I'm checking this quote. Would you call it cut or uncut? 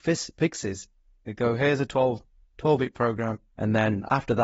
cut